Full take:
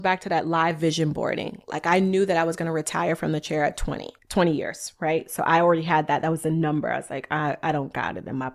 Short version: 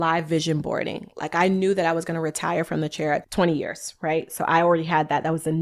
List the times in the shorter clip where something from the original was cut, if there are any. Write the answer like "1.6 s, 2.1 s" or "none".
3.2 s